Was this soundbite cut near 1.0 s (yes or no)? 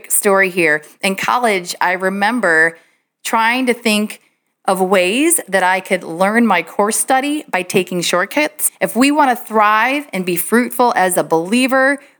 no